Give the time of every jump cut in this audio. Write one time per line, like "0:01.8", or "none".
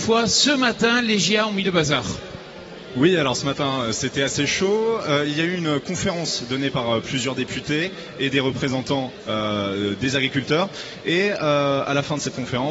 none